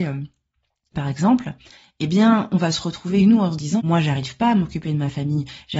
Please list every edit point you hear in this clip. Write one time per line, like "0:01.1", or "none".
0:00.9
0:03.8